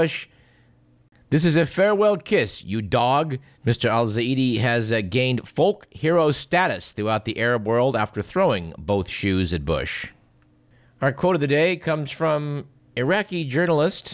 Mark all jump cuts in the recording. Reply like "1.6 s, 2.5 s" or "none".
3.5 s, 10.8 s